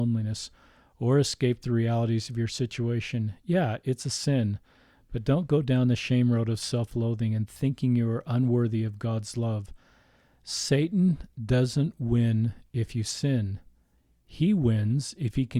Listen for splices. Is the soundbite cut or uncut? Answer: uncut